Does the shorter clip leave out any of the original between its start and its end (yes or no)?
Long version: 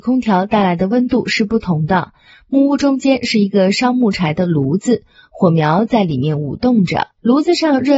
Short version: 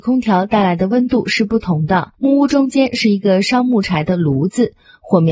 yes